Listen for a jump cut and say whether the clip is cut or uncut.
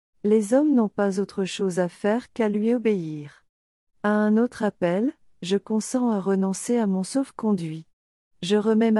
cut